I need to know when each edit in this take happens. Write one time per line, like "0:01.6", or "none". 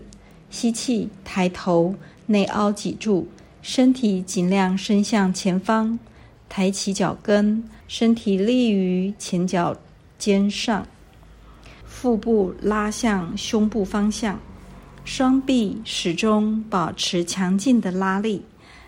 0:07.8
0:11.8